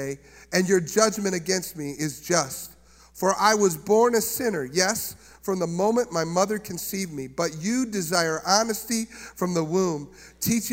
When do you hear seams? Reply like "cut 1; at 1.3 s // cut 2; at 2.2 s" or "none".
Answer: none